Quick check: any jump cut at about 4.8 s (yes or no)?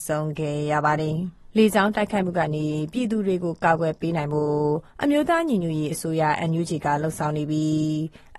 no